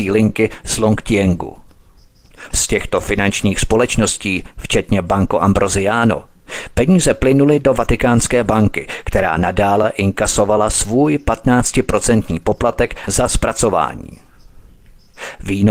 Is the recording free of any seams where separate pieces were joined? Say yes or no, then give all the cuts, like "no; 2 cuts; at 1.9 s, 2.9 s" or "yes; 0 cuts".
no; 1 cut; at 2.5 s